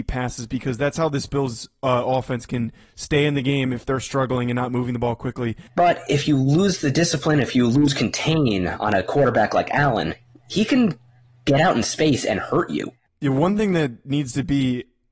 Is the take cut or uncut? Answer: cut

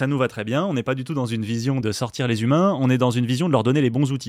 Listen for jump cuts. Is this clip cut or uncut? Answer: cut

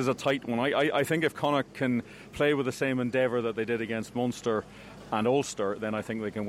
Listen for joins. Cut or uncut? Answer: uncut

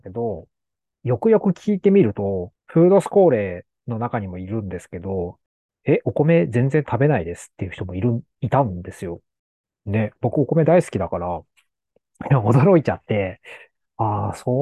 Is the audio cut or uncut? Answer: uncut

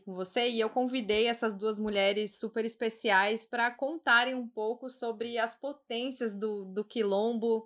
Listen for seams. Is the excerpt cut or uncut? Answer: uncut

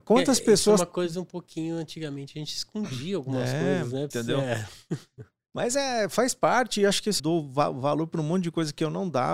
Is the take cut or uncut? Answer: cut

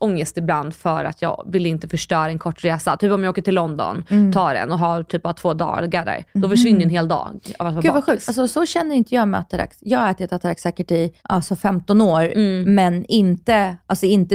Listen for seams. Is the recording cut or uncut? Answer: cut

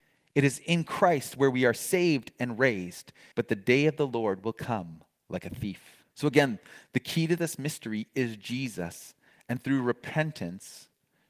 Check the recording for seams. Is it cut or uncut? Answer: cut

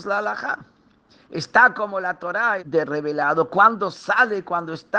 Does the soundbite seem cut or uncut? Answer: cut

